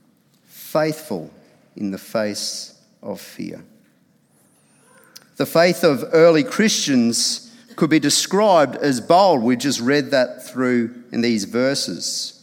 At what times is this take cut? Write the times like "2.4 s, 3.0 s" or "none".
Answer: none